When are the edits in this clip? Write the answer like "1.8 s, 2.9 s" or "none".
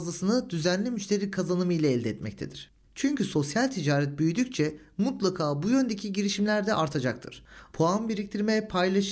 2.8 s, 7.7 s